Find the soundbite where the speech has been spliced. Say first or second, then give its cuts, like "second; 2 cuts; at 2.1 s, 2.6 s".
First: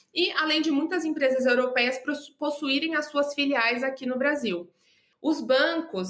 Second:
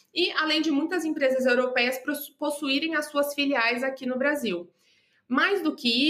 first; 1 cut; at 5.1 s